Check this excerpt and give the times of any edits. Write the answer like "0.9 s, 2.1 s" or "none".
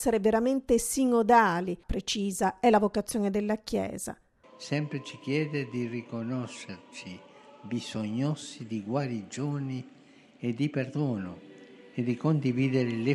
1.8 s, 4.4 s